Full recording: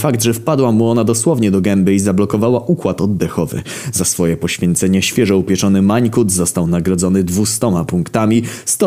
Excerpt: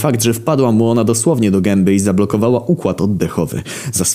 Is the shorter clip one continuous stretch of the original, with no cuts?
yes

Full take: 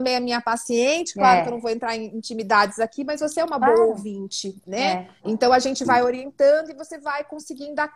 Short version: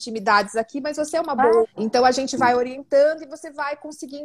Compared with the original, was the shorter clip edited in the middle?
yes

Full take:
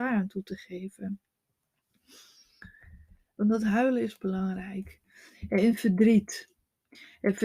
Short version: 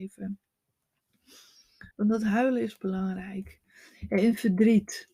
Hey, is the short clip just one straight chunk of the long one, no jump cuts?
no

